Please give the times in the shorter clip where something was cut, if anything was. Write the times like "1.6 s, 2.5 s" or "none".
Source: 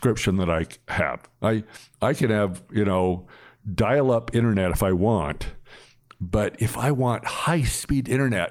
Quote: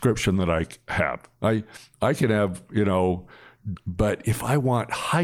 3.8 s